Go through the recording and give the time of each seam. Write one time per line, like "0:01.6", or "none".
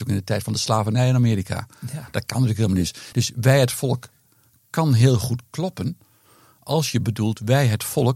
none